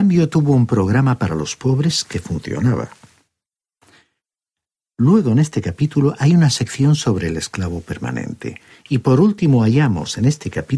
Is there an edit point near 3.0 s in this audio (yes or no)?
no